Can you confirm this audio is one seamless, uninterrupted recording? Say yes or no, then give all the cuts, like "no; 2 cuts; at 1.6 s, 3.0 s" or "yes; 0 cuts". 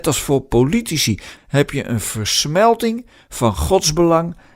no; 1 cut; at 1.4 s